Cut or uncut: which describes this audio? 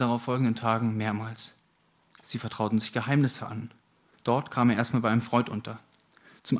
cut